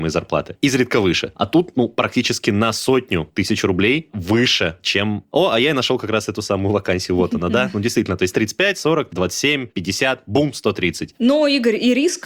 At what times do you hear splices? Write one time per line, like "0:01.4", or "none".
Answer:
0:09.1